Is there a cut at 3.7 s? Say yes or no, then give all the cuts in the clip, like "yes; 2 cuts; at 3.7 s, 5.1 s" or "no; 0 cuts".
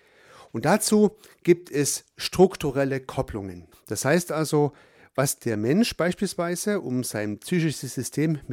yes; 1 cut; at 3.7 s